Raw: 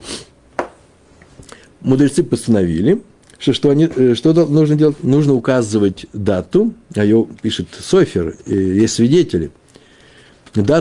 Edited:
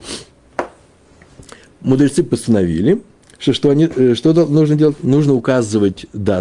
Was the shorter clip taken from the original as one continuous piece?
yes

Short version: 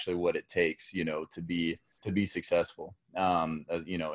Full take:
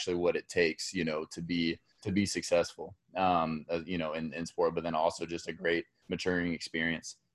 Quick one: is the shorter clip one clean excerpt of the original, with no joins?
yes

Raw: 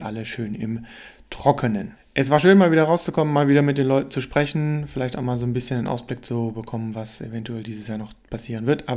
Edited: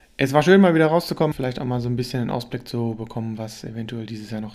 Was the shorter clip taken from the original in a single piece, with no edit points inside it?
no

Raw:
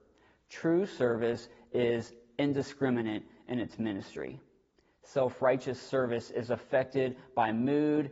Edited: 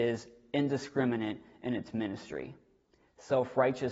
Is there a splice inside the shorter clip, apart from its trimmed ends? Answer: no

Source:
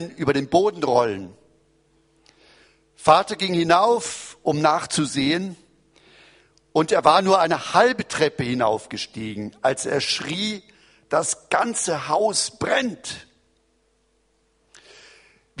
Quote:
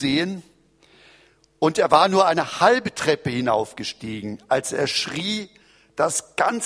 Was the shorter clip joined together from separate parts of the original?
no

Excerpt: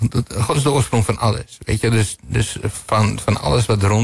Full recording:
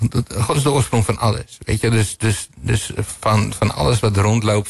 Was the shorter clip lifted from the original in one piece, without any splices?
no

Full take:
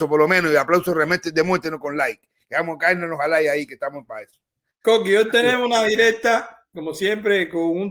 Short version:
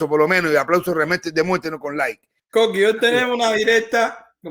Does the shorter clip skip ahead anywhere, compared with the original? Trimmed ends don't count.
yes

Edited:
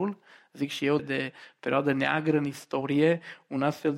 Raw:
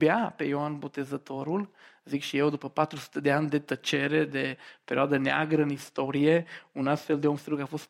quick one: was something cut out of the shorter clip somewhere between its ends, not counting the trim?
yes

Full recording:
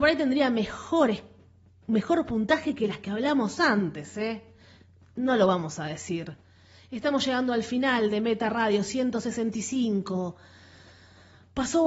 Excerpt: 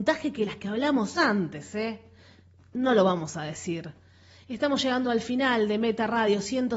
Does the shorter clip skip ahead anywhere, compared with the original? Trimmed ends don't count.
no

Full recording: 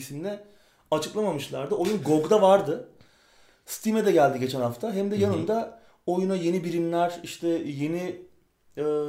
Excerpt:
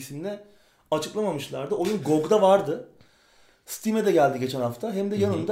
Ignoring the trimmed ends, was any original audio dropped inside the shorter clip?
no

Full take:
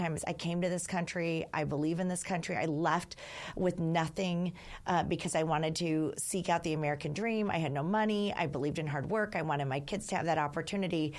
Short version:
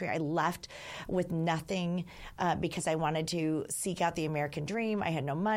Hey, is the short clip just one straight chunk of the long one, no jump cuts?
yes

